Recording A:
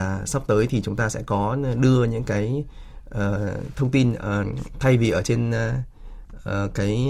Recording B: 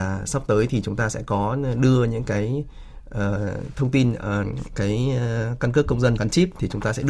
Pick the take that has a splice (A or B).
B